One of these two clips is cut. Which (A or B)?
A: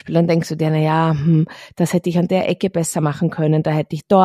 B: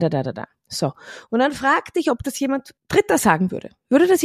B